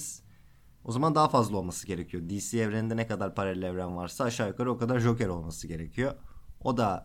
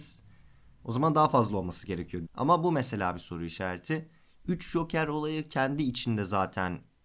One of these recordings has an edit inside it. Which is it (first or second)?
second